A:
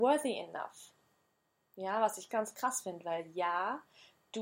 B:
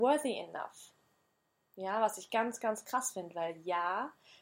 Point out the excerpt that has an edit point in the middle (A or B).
A